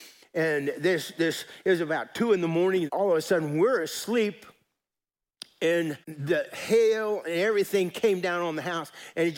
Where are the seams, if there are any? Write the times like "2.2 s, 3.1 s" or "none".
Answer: 2.9 s, 6.0 s